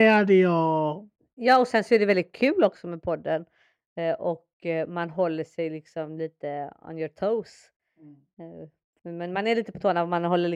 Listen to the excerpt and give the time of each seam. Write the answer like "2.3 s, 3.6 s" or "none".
9.0 s